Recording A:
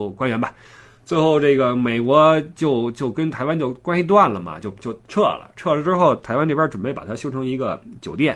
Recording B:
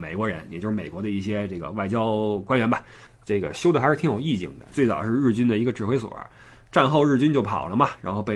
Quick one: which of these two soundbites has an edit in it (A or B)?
B